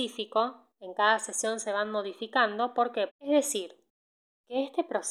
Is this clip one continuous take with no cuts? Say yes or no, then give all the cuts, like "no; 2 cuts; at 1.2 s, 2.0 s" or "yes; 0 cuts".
no; 1 cut; at 3.1 s